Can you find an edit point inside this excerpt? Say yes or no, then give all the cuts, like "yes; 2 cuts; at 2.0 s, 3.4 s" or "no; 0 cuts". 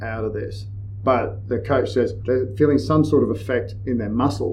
yes; 1 cut; at 2.3 s